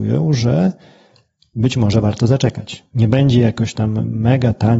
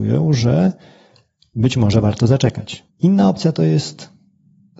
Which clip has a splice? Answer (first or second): second